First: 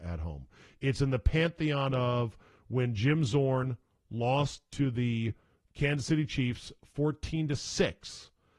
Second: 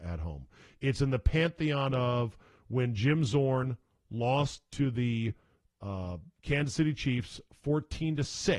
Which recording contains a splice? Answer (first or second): first